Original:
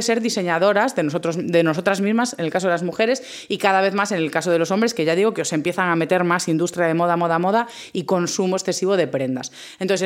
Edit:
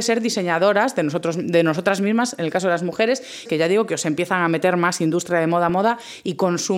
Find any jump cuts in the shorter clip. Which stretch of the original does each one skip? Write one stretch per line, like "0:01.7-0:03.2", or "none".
0:03.5-0:04.9
0:07.2-0:07.4